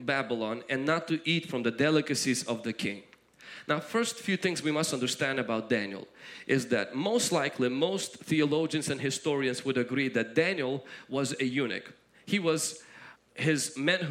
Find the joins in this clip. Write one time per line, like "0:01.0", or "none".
0:13.2